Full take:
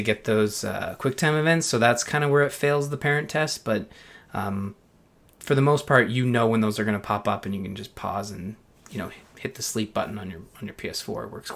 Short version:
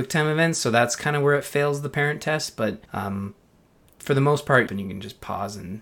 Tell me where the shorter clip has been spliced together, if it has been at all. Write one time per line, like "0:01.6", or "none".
0:02.8
0:04.7